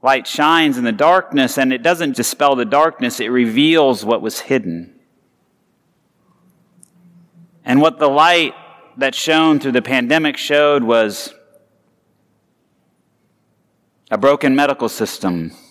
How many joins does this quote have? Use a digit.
1